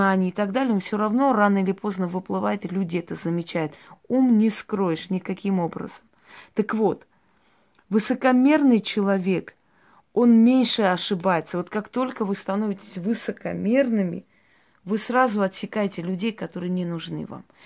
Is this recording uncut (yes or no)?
yes